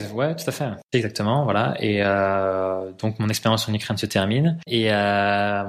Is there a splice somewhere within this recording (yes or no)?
yes